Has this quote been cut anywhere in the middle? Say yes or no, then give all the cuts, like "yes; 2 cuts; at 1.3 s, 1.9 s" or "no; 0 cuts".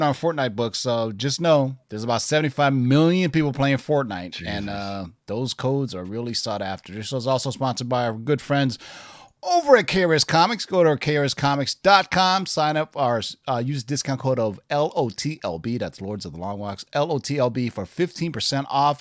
no; 0 cuts